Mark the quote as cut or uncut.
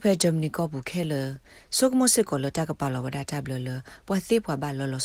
uncut